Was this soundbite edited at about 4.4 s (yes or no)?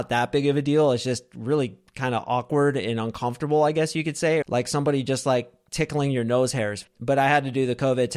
yes